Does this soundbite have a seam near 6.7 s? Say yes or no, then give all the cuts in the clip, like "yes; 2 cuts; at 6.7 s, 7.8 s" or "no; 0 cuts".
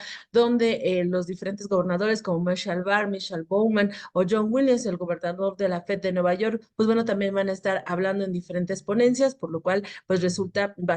yes; 1 cut; at 6.7 s